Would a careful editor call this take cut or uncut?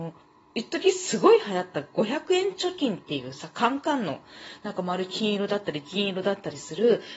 uncut